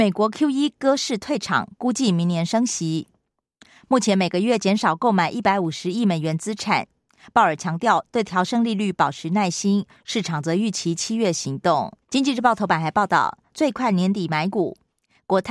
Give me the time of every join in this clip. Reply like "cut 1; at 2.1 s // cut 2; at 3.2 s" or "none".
cut 1; at 12.0 s // cut 2; at 13.5 s